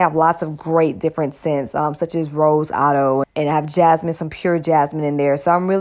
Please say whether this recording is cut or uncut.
cut